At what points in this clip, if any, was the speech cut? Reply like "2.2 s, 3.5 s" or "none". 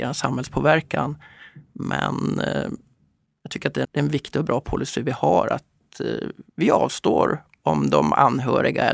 3.8 s